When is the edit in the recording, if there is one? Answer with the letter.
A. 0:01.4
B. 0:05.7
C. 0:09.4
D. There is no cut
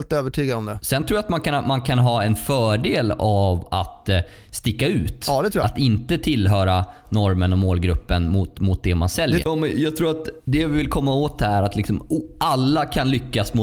C